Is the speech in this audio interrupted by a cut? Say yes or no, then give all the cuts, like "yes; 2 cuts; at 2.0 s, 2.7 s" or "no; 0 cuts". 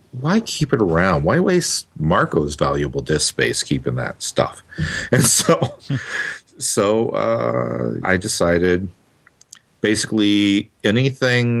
yes; 1 cut; at 8.0 s